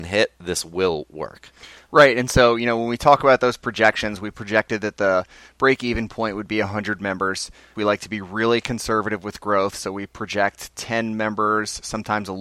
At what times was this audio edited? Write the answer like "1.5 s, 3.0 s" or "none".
7.8 s